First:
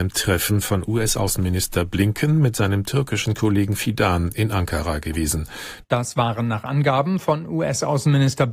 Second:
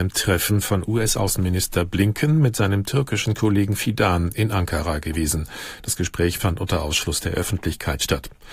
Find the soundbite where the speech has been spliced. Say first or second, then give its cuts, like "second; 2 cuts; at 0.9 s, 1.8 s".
first; 1 cut; at 5.8 s